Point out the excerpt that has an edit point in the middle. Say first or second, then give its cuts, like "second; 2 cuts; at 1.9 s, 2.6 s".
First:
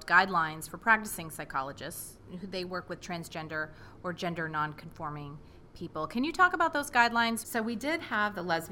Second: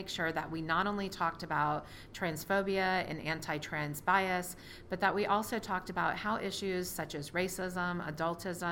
first; 1 cut; at 7.4 s